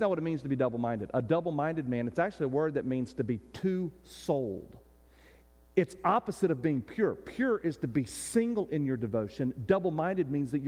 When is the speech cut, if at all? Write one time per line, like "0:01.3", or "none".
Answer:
none

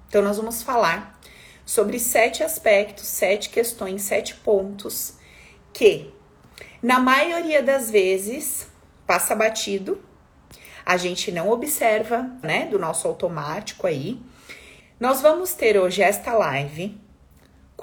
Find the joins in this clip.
0:12.4
0:14.8

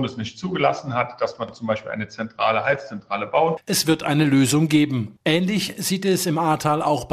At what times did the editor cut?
0:03.6
0:05.2

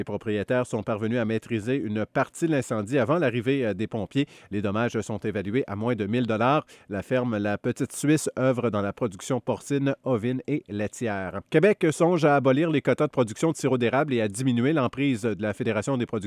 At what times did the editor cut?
0:11.5

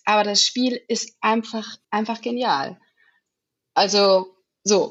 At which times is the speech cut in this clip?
0:01.8

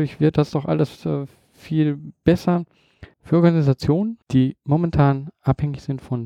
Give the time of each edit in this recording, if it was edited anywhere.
0:03.1
0:04.2

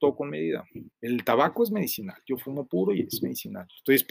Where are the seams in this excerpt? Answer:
0:00.9

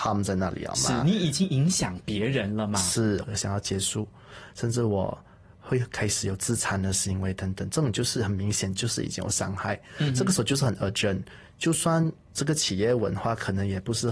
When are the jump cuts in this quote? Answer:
0:03.2

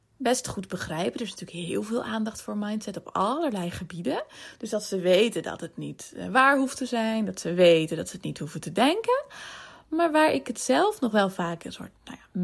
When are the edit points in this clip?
none

